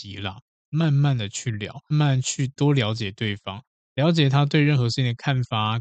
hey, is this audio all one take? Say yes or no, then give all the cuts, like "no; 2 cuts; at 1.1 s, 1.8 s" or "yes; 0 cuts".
no; 1 cut; at 1.9 s